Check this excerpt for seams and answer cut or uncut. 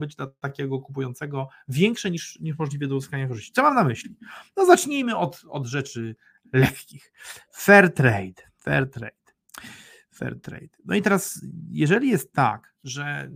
uncut